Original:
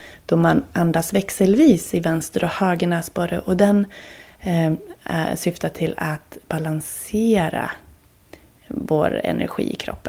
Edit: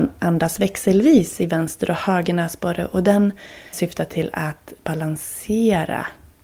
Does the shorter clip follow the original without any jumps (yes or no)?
no